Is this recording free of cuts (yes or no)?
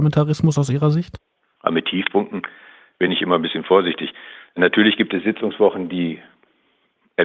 yes